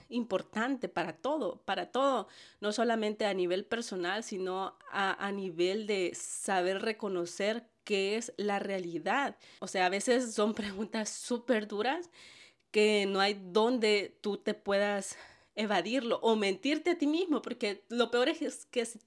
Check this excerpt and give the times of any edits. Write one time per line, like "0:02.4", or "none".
0:09.6